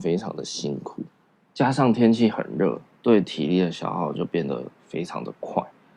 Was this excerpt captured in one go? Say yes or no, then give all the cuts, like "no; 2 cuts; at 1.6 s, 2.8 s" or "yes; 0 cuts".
yes; 0 cuts